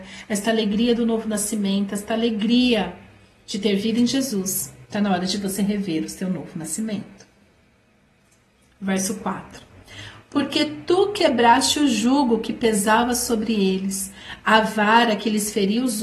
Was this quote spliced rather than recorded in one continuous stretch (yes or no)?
no